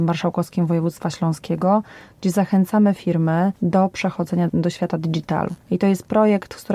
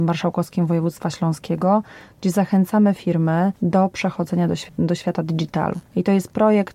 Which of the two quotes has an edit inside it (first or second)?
first